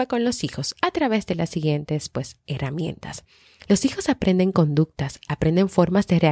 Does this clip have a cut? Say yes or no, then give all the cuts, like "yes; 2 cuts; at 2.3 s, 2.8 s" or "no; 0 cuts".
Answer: yes; 1 cut; at 3.7 s